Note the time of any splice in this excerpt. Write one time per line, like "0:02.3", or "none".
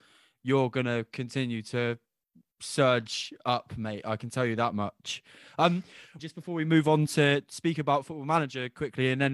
0:06.2